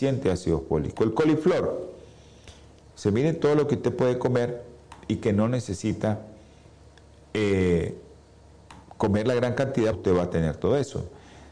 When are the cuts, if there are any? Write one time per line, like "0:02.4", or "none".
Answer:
0:02.9
0:09.9